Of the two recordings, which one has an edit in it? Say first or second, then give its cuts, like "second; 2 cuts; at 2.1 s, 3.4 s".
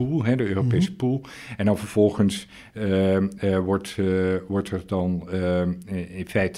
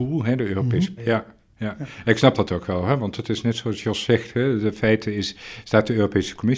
second; 1 cut; at 1.0 s